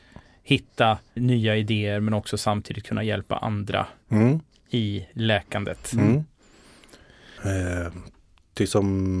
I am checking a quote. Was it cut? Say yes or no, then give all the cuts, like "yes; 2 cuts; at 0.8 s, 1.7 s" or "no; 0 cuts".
yes; 2 cuts; at 1.2 s, 7.4 s